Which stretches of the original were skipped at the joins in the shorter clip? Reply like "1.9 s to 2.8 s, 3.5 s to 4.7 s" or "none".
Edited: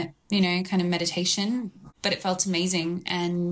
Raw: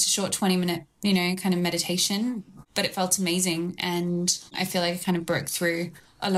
none